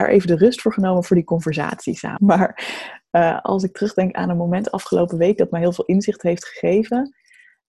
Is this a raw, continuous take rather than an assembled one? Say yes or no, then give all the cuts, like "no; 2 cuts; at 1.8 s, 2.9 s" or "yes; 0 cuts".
no; 1 cut; at 2.2 s